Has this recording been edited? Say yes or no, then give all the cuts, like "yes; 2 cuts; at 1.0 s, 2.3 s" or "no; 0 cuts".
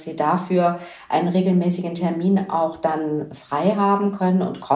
no; 0 cuts